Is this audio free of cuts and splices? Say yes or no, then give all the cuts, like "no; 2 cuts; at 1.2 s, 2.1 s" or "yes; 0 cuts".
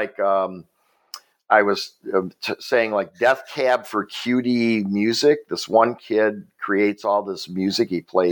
yes; 0 cuts